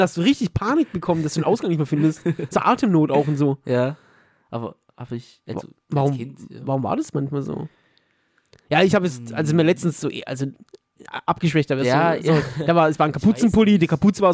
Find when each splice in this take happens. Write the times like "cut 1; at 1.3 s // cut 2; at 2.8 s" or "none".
none